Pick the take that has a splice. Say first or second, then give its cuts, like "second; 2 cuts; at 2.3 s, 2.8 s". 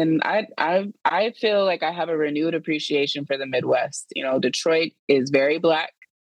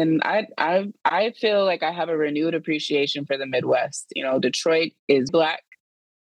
second; 1 cut; at 5.3 s